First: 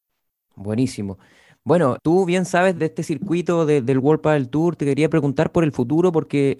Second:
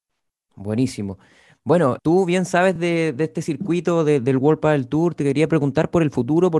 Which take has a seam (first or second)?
first